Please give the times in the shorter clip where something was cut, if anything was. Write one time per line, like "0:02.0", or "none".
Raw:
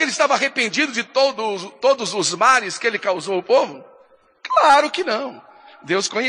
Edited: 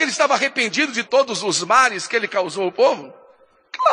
0:01.1